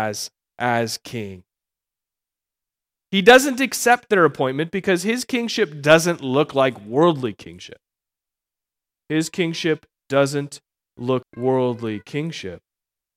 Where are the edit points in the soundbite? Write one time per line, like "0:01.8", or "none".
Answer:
0:03.1
0:11.2